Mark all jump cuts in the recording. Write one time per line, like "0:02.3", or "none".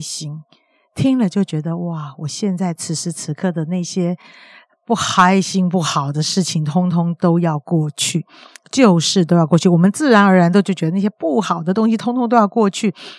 none